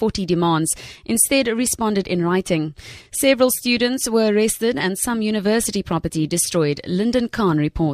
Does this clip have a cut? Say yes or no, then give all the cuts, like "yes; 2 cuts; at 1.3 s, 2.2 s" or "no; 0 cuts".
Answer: no; 0 cuts